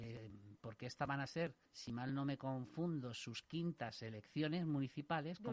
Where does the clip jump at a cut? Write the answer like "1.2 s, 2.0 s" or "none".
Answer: 1.6 s